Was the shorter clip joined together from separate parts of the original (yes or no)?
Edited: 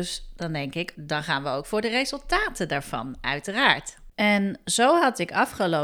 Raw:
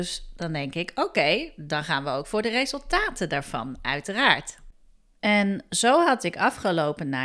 yes